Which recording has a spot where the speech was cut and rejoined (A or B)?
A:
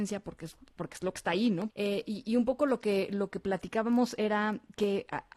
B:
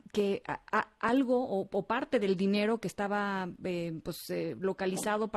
A